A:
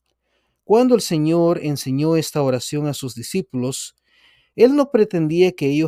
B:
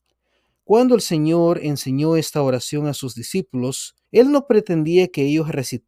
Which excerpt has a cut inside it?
B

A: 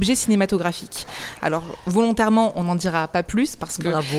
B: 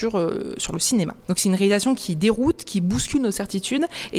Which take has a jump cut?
A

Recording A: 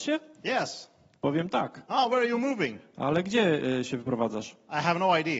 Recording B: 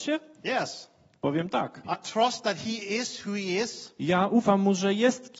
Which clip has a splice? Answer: B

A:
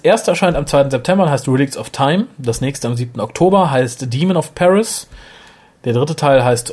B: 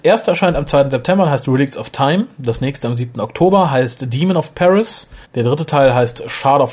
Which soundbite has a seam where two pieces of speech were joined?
B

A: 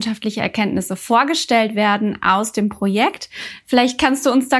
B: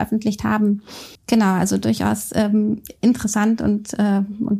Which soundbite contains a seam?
B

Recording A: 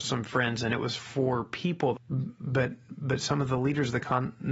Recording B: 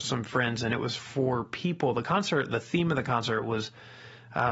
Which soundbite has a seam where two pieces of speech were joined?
A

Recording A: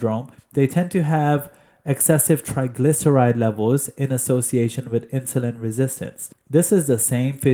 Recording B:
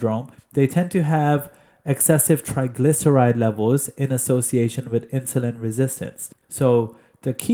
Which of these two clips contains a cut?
B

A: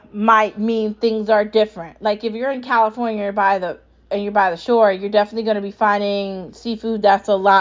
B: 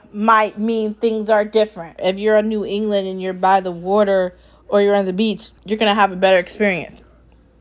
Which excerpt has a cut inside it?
B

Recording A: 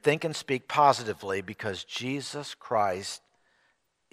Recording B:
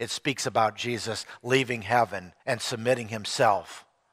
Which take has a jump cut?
B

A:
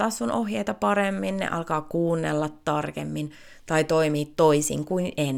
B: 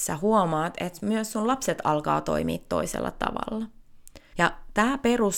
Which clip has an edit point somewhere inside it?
B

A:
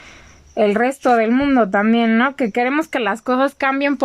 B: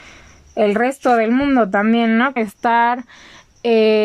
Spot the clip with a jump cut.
B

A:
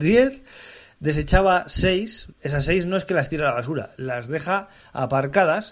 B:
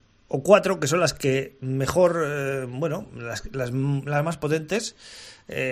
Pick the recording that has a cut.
A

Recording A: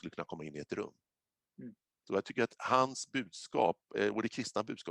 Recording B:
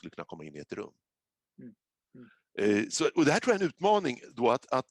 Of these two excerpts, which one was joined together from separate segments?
A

